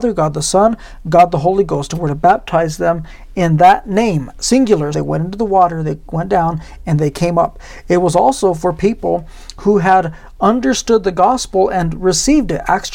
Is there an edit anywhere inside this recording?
yes; 1 cut; at 4.9 s

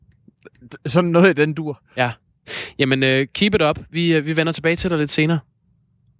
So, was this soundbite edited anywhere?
no; 0 cuts

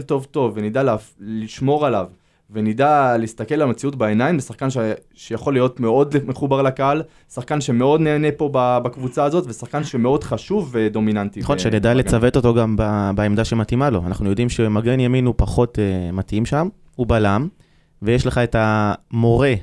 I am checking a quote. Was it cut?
no; 0 cuts

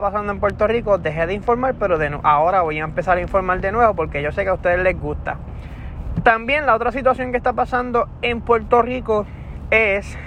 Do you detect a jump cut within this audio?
no; 0 cuts

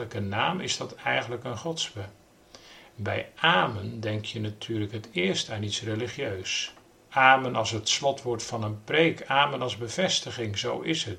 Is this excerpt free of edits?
yes; 0 cuts

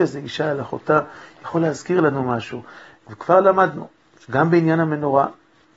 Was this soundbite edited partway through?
yes; 1 cut; at 3.0 s

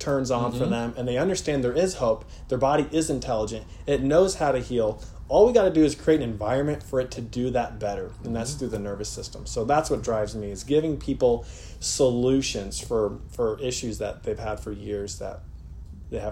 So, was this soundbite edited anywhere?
no; 0 cuts

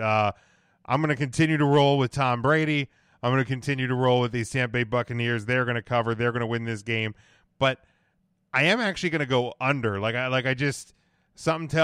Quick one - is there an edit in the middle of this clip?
no; 0 cuts

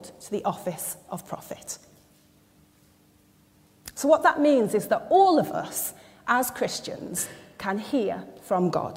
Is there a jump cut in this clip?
no; 0 cuts

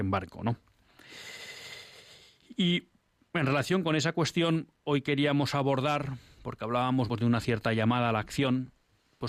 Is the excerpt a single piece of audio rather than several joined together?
no; 1 cut; at 7.1 s

